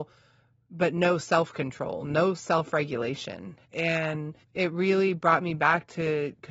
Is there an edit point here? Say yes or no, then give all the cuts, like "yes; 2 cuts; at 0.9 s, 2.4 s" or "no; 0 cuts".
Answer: yes; 1 cut; at 3.6 s